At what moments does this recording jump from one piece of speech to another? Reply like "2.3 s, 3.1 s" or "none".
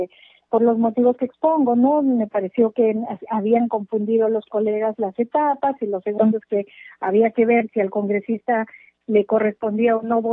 none